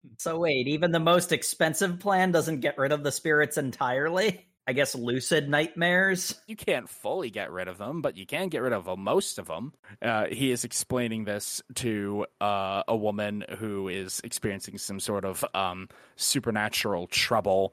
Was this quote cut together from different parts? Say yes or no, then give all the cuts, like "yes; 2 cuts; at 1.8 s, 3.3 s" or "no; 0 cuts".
yes; 2 cuts; at 4.6 s, 6.5 s